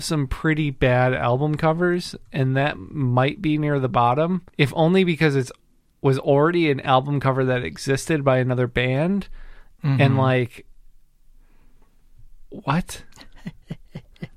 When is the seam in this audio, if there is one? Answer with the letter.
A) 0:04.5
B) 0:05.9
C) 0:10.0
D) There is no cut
A